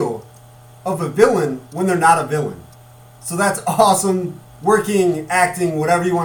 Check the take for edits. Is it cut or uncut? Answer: uncut